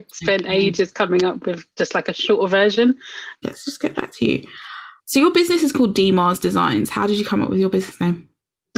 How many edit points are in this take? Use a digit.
2